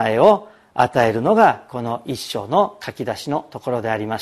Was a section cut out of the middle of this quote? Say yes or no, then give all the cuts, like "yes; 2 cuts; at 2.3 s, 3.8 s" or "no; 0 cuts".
no; 0 cuts